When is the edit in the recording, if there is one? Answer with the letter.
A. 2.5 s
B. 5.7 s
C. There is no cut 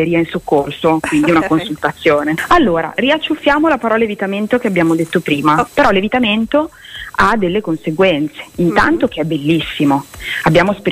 B